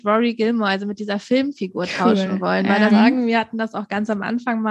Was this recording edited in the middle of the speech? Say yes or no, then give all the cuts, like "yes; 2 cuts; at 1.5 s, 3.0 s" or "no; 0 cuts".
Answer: yes; 1 cut; at 2.9 s